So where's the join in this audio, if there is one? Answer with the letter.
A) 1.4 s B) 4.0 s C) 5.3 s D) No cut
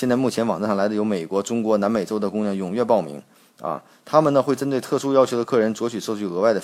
D